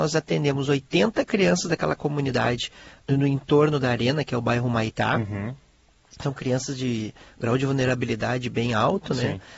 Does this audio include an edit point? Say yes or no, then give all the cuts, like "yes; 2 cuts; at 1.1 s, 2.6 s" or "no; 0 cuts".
no; 0 cuts